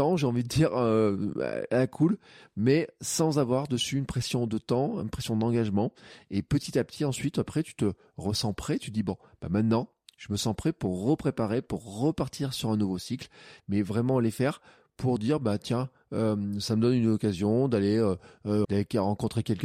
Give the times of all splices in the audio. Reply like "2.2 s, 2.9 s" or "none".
13.6 s, 18.6 s